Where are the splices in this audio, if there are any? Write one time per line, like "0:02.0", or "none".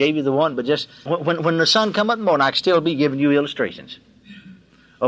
0:01.1